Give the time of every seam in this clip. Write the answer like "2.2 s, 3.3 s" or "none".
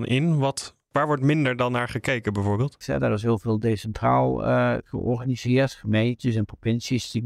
2.8 s